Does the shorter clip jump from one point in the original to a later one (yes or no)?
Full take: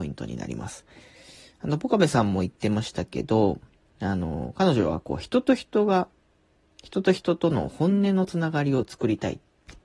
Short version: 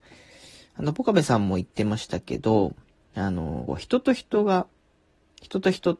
yes